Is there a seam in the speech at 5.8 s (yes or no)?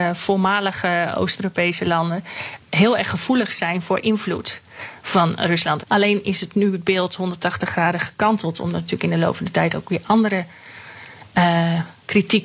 yes